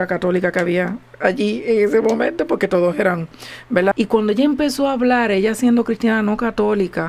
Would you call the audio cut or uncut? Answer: cut